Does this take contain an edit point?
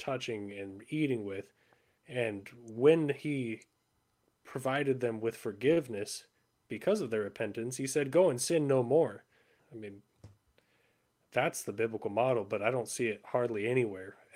yes; 2 cuts; at 2.0 s, 9.6 s

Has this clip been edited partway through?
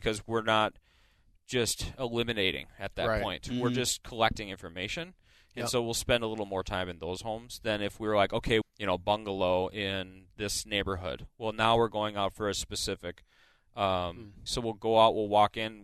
yes; 2 cuts; at 8.6 s, 14.5 s

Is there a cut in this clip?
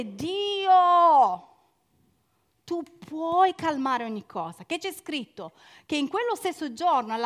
no; 0 cuts

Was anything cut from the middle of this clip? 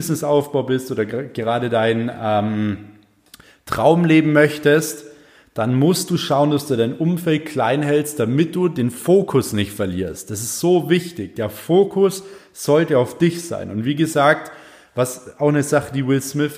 no; 0 cuts

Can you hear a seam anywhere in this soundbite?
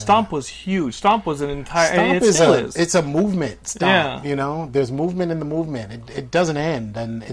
no; 0 cuts

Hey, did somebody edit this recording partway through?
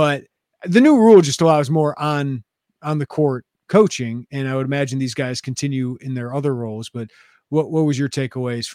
no; 0 cuts

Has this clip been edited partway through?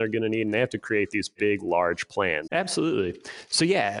yes; 1 cut; at 2.5 s

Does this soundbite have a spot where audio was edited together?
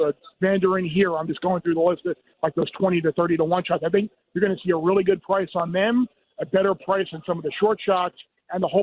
no; 0 cuts

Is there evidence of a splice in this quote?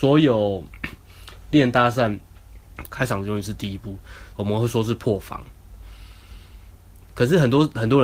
yes; 2 cuts; at 2.9 s, 4.3 s

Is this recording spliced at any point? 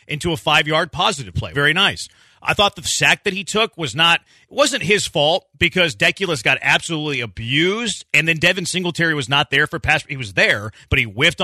yes; 1 cut; at 1.5 s

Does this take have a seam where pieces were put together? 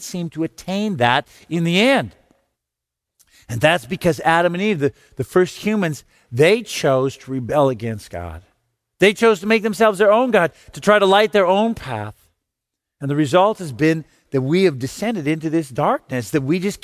no; 0 cuts

